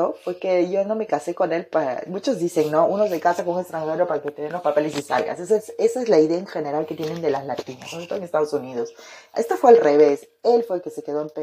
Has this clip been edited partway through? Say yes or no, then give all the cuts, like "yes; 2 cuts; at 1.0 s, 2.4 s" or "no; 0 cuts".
no; 0 cuts